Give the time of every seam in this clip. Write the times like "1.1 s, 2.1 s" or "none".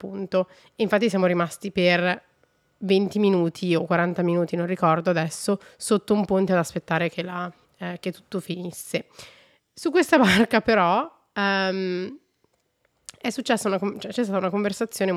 none